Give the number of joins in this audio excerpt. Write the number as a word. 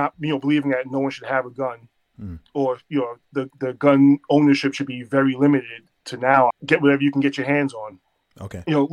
one